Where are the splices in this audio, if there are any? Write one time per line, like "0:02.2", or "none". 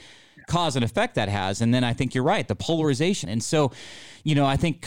0:03.2

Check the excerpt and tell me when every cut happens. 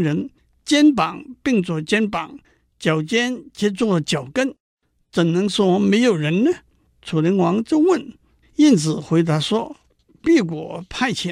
0:08.4
0:09.8

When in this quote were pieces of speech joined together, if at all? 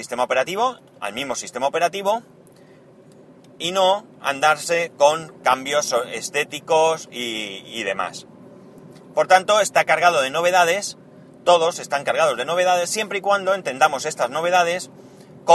none

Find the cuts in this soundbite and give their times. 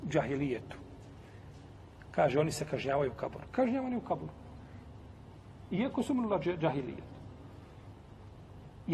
0:03.5

